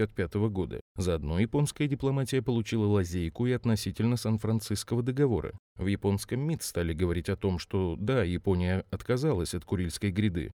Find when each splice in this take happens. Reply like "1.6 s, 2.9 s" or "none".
none